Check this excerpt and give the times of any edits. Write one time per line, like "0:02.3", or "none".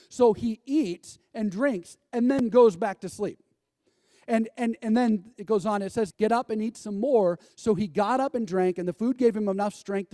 0:06.1
0:07.5